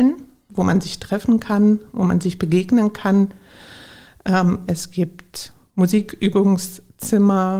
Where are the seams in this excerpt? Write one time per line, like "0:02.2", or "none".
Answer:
none